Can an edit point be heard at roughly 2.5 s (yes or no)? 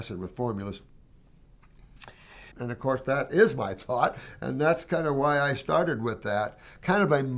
yes